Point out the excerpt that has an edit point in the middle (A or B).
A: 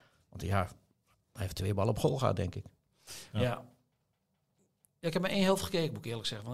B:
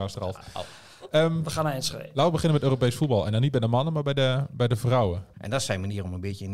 B